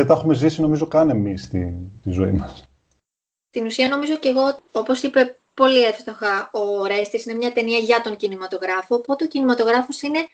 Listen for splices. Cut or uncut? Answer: uncut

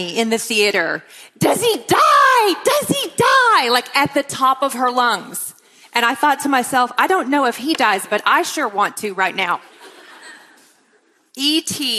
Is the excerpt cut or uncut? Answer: uncut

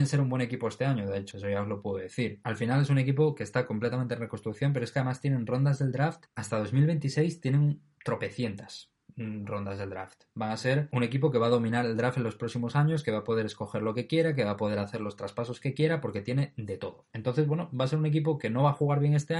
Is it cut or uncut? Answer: cut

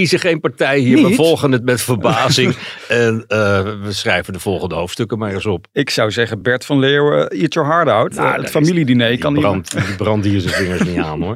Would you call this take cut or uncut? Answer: uncut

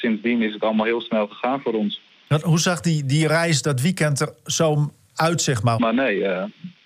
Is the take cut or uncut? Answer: cut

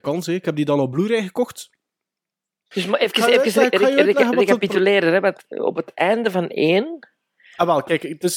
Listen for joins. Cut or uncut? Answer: cut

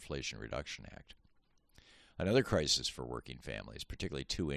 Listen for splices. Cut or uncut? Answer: uncut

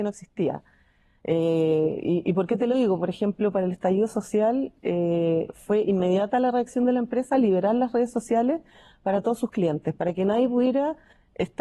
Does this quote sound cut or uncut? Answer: uncut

